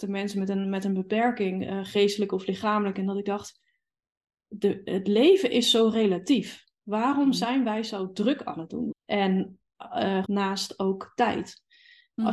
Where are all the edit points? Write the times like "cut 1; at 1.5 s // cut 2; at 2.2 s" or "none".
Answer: cut 1; at 8.9 s // cut 2; at 10.2 s